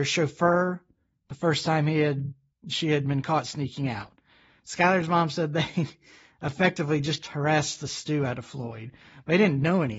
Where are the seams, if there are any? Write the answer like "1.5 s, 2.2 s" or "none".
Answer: none